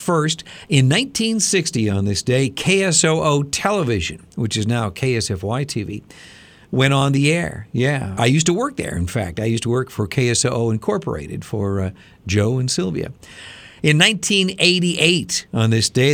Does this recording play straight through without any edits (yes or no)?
yes